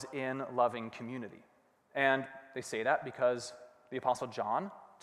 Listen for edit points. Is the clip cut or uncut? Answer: cut